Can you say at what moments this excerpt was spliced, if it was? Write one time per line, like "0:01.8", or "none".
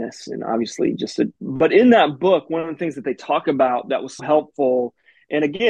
0:01.4
0:04.2